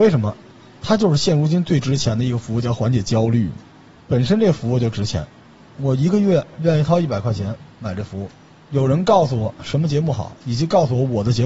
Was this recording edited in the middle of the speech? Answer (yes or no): yes